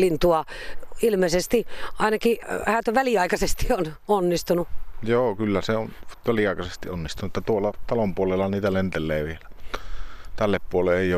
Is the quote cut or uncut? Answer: uncut